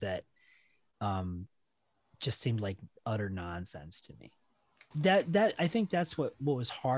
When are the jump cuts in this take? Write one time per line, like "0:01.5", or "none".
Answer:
0:04.9